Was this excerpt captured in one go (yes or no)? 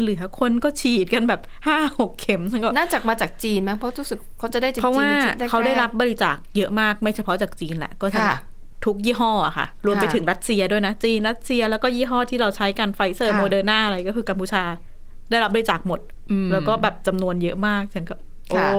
yes